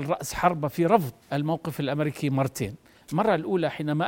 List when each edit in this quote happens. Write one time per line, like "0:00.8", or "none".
0:01.2